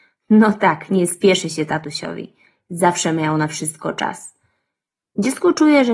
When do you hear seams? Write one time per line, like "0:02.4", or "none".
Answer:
none